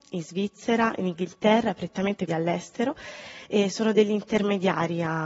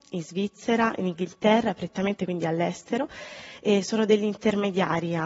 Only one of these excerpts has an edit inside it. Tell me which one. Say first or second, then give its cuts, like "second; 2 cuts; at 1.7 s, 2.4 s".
first; 1 cut; at 2.3 s